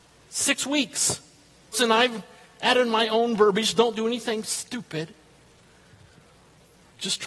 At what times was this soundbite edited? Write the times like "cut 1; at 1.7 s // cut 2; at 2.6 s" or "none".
cut 1; at 1.7 s